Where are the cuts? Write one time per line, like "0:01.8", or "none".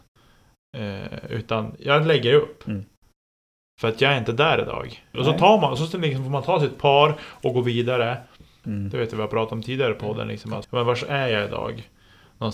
0:05.1
0:08.6
0:10.6